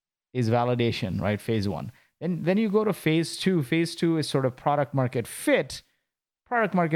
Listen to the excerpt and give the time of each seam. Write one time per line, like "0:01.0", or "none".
none